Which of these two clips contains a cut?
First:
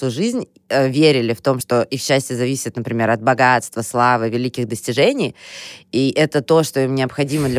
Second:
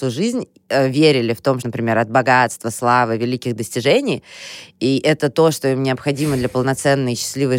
second; 1 cut; at 1.6 s

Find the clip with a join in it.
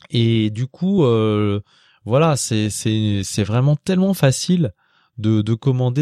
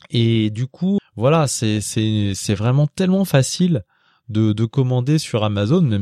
second; 1 cut; at 1.0 s

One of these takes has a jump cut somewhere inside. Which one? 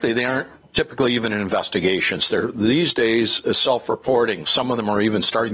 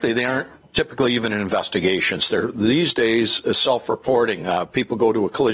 first; 1 cut; at 4.4 s

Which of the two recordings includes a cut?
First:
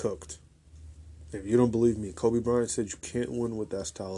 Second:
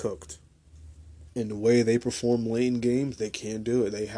second; 1 cut; at 1.3 s

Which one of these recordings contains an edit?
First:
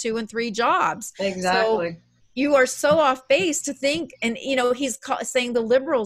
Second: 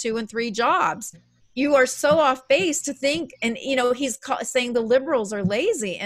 second; 1 cut; at 1.1 s

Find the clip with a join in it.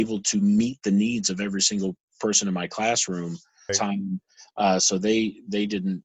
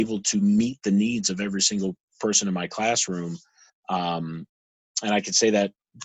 first; 1 cut; at 3.7 s

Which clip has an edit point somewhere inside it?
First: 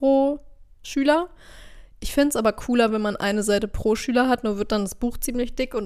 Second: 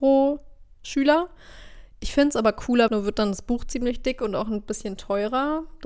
second; 1 cut; at 2.9 s

